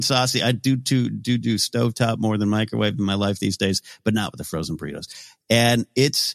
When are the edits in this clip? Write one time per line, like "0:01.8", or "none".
none